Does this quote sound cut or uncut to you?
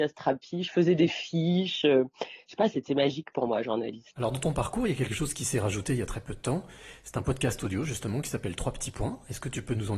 uncut